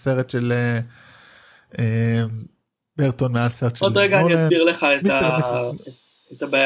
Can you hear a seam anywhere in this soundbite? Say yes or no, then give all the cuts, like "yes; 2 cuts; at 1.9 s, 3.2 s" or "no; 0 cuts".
no; 0 cuts